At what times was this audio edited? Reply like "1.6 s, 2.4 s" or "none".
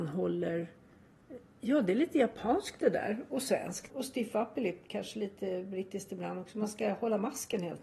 3.9 s